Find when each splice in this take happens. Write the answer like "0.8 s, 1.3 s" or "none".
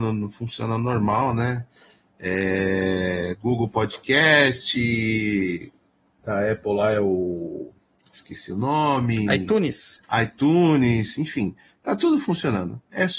none